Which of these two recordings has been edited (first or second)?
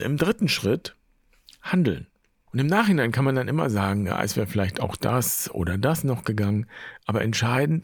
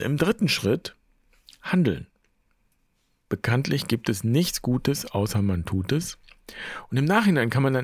first